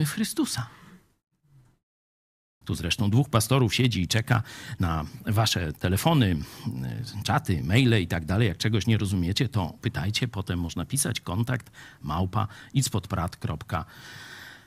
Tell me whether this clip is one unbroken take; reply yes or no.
no